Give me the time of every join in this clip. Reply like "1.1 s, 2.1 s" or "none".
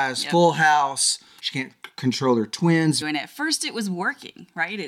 1.4 s, 3.0 s